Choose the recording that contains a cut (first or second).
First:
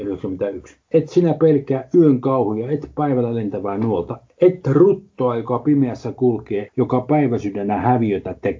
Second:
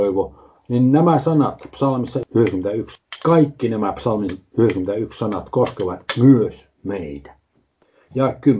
first